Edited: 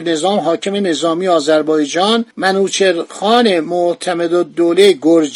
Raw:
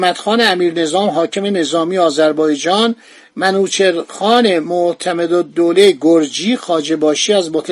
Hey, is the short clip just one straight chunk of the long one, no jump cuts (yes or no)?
no